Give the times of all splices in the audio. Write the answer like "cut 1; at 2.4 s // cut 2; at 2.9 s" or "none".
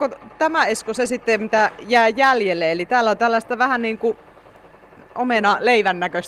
none